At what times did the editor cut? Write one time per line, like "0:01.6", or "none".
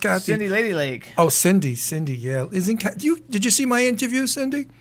none